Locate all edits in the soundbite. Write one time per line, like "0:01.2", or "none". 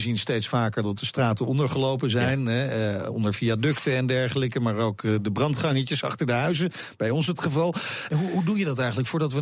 0:08.1